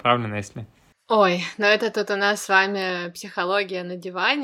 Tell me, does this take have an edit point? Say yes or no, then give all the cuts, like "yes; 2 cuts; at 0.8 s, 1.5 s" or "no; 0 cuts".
no; 0 cuts